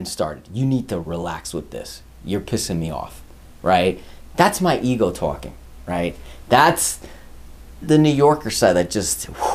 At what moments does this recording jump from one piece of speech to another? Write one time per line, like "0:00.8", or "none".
0:01.0
0:07.8